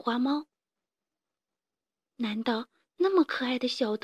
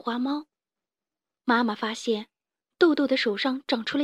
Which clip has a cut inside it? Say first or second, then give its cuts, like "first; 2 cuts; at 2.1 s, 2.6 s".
second; 1 cut; at 1.4 s